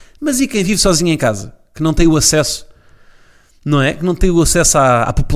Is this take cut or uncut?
uncut